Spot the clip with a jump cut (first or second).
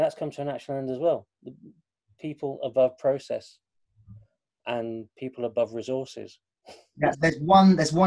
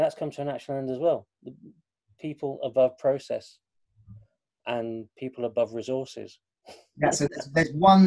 first